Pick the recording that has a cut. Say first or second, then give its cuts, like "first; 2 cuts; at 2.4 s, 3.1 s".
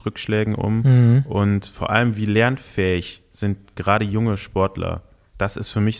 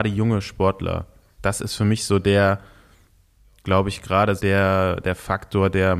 second; 1 cut; at 4.4 s